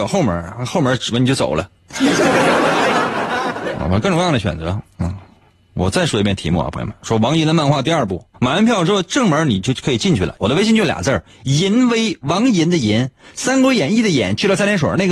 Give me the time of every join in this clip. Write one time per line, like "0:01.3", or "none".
0:08.3
0:10.4